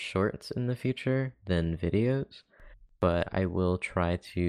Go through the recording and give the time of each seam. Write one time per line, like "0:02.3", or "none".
none